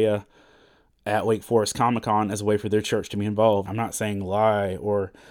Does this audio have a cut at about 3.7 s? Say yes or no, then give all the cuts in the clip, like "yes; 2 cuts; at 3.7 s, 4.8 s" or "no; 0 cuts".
yes; 1 cut; at 3.7 s